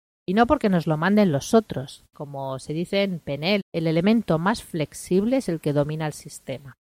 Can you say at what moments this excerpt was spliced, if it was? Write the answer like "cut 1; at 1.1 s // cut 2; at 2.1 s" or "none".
cut 1; at 2.1 s // cut 2; at 3.6 s